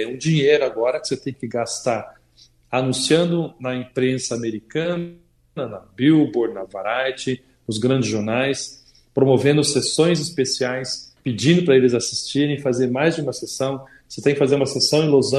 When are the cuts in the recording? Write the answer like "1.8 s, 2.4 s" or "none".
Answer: 11.2 s